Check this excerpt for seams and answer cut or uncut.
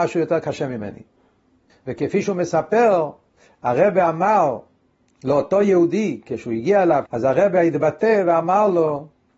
cut